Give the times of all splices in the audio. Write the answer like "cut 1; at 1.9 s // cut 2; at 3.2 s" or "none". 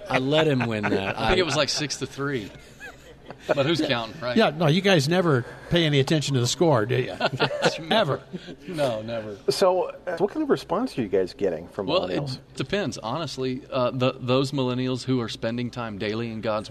cut 1; at 10.2 s // cut 2; at 12.6 s